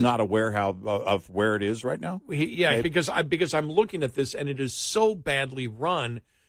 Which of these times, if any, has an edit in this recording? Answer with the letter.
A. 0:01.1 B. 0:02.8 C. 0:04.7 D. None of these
B